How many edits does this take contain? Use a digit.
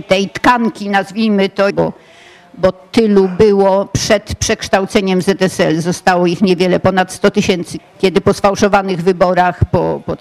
2